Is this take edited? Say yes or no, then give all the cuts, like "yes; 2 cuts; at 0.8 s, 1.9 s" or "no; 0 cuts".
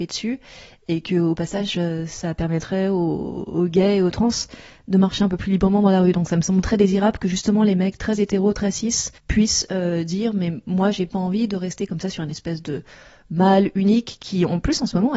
yes; 2 cuts; at 6.6 s, 9.2 s